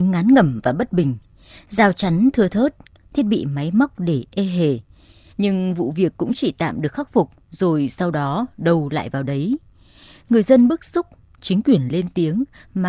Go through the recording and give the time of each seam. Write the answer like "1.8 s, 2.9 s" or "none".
3.0 s, 5.3 s

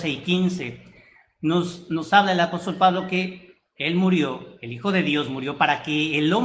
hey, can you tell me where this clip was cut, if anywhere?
none

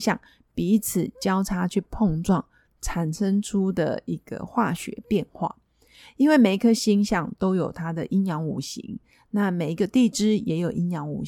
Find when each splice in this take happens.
none

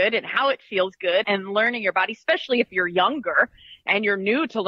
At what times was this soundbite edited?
1.2 s

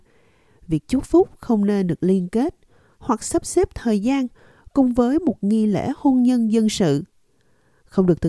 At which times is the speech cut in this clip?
none

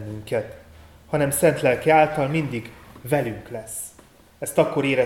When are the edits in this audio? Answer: none

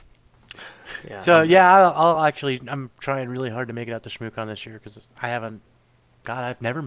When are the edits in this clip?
none

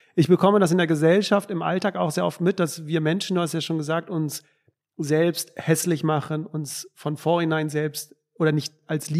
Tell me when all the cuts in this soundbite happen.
none

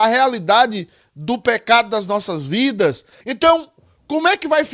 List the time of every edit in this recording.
3.2 s

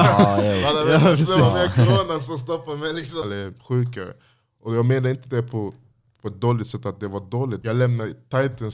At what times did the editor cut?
3.2 s, 7.6 s

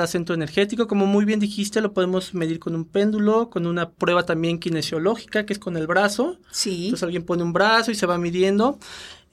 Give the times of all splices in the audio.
none

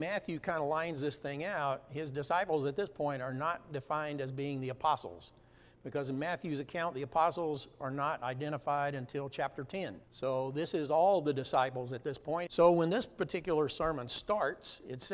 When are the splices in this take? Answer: 10.0 s, 12.5 s

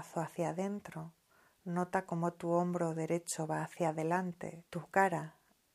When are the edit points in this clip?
4.7 s

